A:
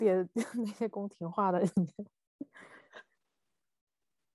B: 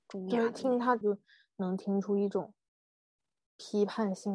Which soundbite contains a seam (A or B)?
B